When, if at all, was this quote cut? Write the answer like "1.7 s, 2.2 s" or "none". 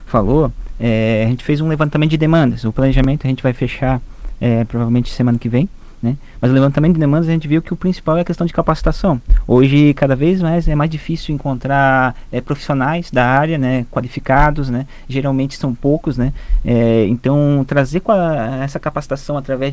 none